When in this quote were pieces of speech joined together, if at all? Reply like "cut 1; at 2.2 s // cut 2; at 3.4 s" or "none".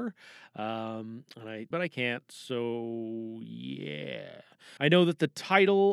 cut 1; at 1.7 s // cut 2; at 4.8 s